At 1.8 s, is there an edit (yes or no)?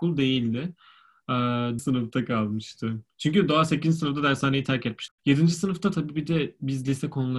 yes